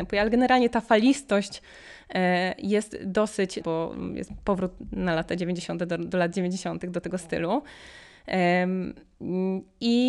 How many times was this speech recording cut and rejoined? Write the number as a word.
one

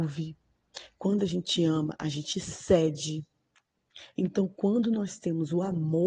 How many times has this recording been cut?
zero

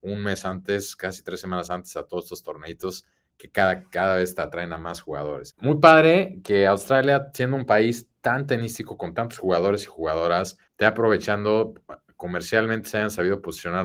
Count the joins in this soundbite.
two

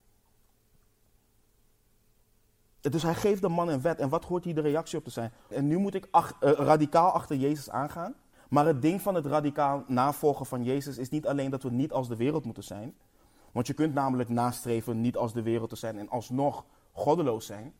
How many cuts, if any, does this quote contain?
two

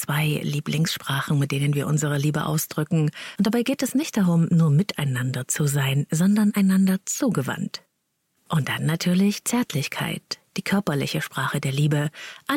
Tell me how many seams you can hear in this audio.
one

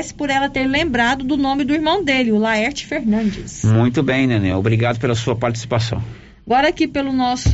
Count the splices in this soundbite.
zero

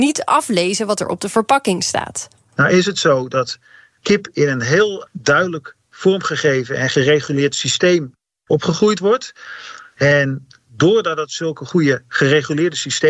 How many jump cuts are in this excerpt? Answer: zero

